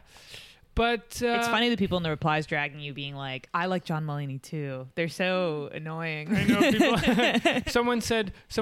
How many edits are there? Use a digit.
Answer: 0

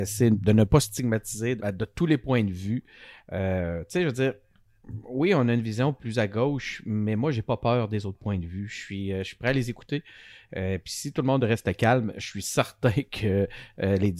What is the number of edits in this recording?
1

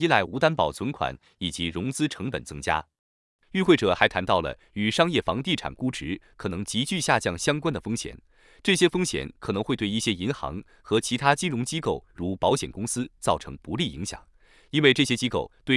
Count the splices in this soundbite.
0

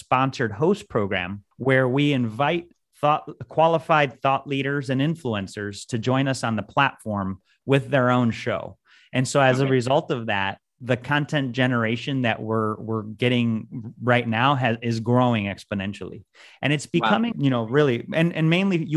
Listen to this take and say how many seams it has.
2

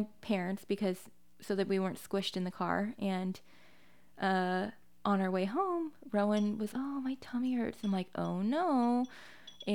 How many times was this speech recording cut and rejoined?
1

